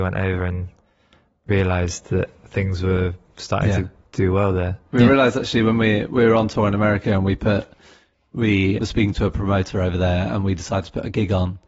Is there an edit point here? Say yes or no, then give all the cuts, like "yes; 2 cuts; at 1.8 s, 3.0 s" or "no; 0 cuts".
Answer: no; 0 cuts